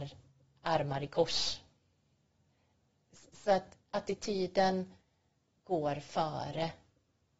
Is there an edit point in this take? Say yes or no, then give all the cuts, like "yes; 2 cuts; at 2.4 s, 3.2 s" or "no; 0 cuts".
no; 0 cuts